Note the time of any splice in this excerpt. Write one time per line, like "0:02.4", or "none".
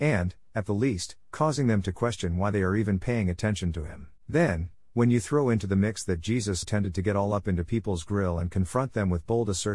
0:04.2
0:06.6